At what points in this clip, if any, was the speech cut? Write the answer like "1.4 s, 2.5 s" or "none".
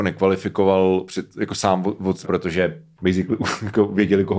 2.2 s

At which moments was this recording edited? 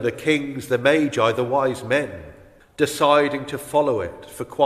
2.6 s

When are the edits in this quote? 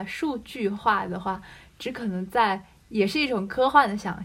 none

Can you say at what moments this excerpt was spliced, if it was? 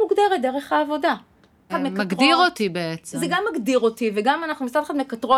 1.7 s

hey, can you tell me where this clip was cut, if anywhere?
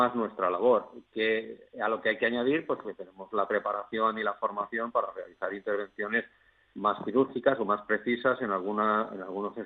2.8 s

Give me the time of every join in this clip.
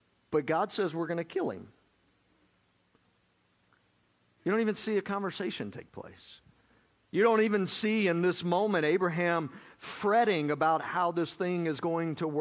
none

